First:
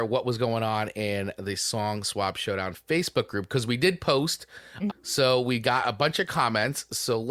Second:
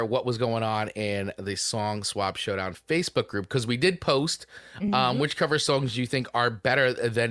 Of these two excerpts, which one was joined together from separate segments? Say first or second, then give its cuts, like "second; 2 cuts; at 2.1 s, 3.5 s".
first; 1 cut; at 4.9 s